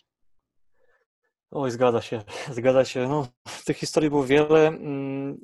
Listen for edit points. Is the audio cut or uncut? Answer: uncut